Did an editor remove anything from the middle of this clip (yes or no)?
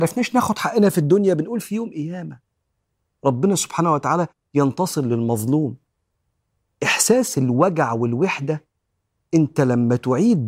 no